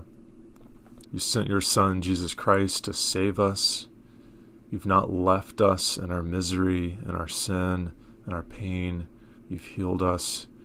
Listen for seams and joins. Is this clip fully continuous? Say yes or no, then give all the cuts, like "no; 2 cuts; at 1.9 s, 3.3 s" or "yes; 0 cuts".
no; 2 cuts; at 1.0 s, 9.4 s